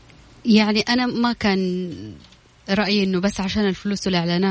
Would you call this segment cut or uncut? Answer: uncut